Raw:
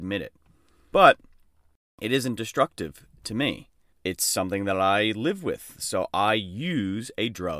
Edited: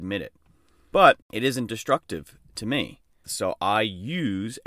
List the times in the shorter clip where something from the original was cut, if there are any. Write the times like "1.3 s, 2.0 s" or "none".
1.2 s, 3.2 s